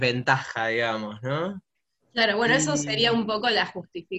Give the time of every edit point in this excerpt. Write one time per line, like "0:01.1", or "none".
none